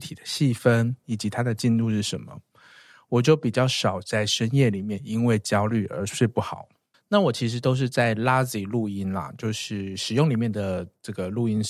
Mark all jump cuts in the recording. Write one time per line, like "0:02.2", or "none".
0:01.0
0:06.9